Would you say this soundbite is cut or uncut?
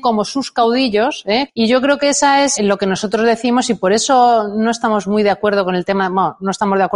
cut